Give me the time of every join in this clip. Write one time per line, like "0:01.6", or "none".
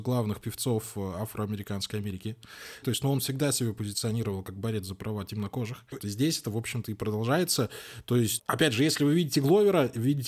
0:02.8
0:06.0
0:08.4